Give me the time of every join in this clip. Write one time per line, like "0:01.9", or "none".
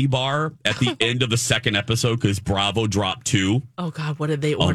none